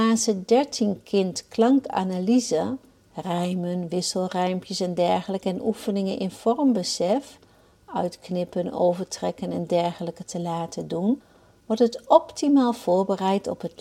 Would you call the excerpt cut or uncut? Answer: uncut